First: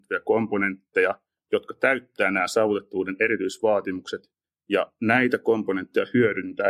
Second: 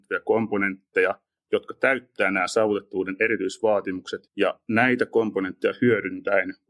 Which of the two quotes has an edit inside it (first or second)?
second